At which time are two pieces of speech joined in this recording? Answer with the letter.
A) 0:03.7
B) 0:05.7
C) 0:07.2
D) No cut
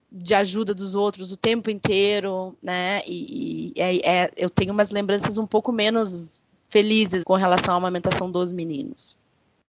C